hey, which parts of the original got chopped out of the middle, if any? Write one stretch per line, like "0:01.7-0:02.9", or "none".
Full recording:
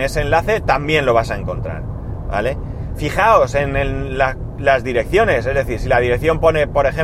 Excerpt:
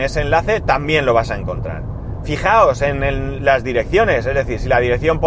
0:02.2-0:03.0
0:04.1-0:04.6